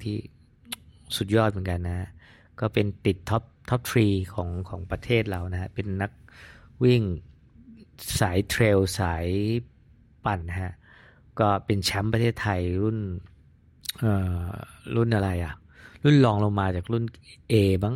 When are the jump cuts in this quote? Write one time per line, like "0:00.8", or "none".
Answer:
0:10.4